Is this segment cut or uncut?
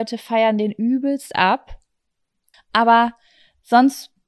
cut